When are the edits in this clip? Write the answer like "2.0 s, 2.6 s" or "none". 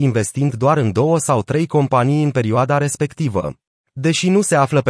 3.7 s

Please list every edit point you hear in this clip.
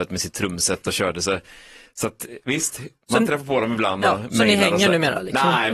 none

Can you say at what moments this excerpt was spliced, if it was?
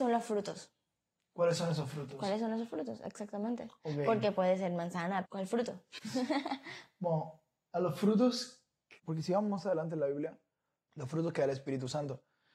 5.2 s, 9.0 s, 10.9 s

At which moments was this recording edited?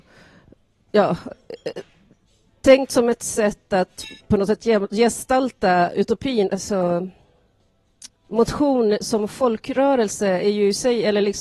4.2 s, 6.5 s, 8.2 s

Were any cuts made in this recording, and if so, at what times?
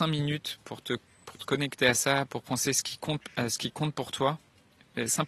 2.3 s

